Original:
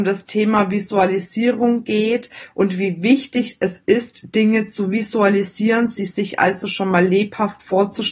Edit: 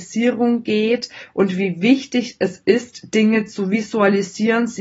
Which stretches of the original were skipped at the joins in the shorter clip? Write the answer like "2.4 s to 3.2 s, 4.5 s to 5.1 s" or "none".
none